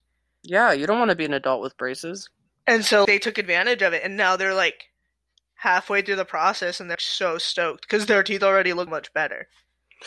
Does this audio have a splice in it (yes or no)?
yes